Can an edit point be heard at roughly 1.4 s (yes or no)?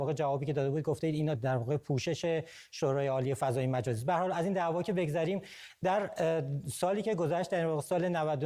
yes